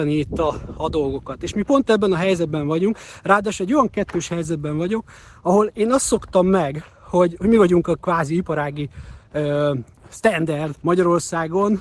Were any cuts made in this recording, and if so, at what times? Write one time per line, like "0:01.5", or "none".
0:10.8